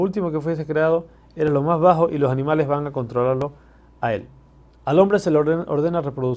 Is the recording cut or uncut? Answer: cut